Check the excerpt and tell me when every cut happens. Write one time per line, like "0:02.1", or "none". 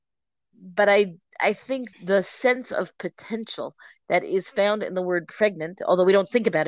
0:01.9